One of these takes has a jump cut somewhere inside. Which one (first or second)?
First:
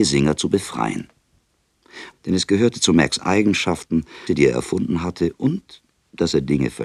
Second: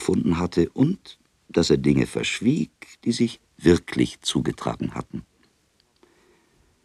first